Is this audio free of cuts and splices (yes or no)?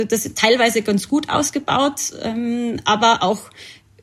yes